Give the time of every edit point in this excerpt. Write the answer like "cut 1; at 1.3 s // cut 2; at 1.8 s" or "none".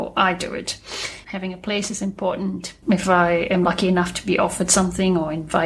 cut 1; at 1.2 s // cut 2; at 2.8 s